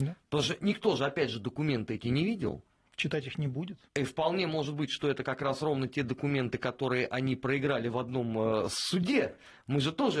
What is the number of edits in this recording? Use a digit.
1